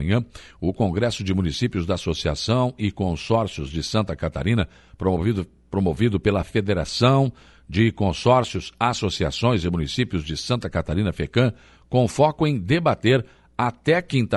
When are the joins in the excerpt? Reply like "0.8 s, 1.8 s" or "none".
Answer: none